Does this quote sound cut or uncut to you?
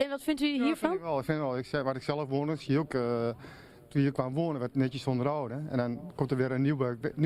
uncut